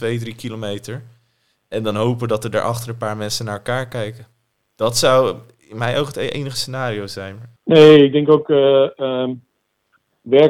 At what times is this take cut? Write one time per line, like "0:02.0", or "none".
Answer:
0:07.6